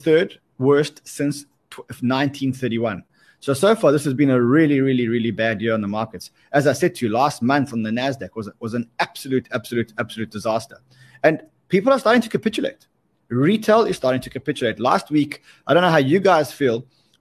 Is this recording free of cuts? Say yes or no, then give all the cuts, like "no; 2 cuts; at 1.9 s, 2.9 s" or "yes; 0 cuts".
yes; 0 cuts